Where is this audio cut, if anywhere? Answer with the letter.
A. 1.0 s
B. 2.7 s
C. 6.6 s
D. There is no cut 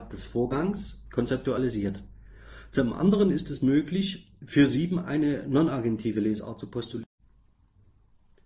A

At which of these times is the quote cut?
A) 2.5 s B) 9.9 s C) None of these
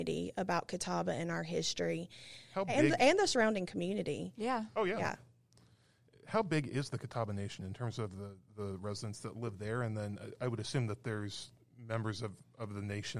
A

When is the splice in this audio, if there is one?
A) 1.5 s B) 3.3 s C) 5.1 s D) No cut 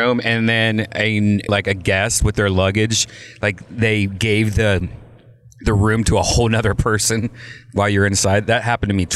A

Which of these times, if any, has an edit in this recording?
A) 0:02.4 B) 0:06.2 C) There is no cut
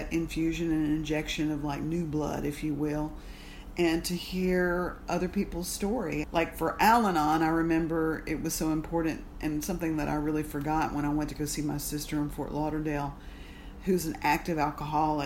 B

